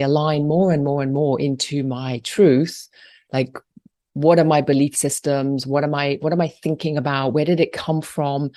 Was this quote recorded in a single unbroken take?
yes; 0 cuts

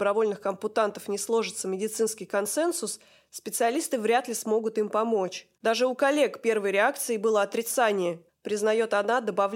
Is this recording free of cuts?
no; 2 cuts; at 5.6 s, 8.3 s

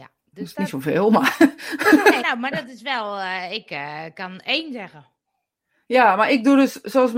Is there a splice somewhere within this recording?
yes; 1 cut; at 2.2 s

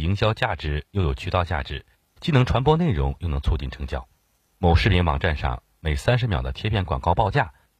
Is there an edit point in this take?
yes; 1 cut; at 4.5 s

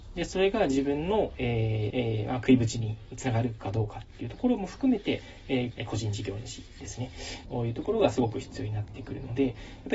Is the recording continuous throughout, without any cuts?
no; 3 cuts; at 1.9 s, 5.7 s, 7.4 s

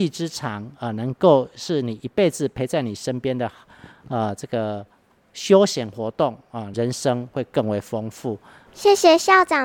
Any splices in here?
yes; 2 cuts; at 6.7 s, 8.7 s

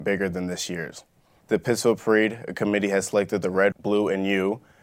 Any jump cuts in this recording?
yes; 2 cuts; at 1.4 s, 3.7 s

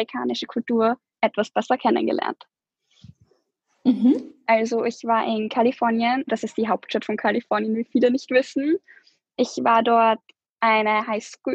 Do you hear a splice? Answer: yes; 2 cuts; at 4.5 s, 6.3 s

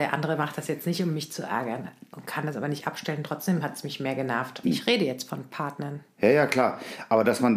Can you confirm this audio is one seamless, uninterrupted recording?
no; 1 cut; at 4.6 s

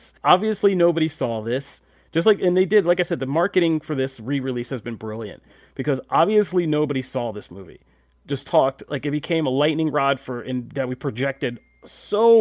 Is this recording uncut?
yes; 0 cuts

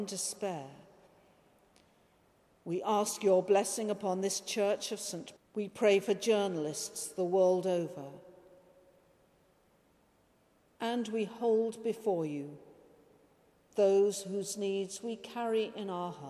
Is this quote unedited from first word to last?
no; 1 cut; at 5.4 s

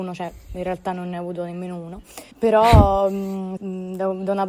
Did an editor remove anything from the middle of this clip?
yes; 2 cuts; at 2.3 s, 3.6 s

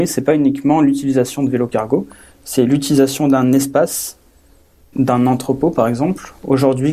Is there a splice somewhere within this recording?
yes; 1 cut; at 4.9 s

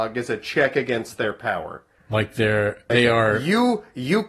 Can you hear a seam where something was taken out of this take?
yes; 1 cut; at 2.9 s

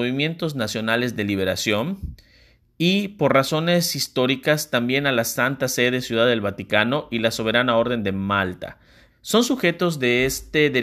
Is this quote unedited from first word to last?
no; 1 cut; at 9.1 s

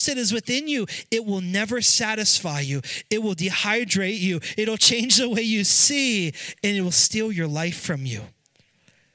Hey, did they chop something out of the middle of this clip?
no; 0 cuts

